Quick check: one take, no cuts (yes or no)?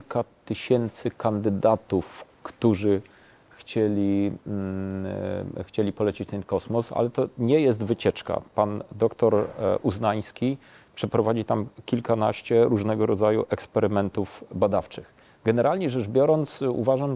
yes